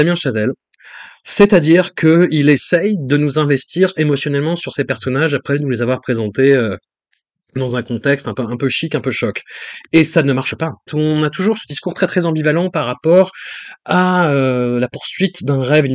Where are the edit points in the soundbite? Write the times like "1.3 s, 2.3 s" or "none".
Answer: 10.9 s